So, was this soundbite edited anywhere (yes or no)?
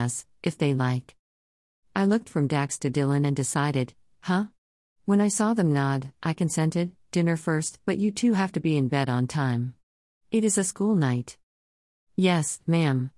yes